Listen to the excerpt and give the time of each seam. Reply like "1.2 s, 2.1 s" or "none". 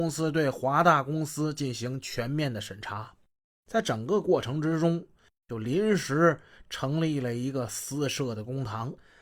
5.3 s